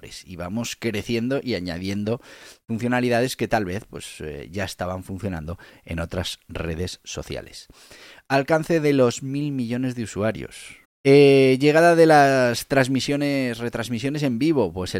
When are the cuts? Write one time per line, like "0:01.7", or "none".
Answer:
0:10.8